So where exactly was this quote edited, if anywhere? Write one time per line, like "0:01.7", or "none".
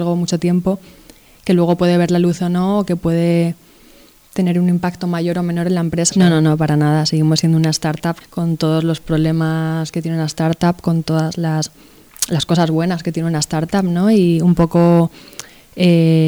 0:06.1
0:08.2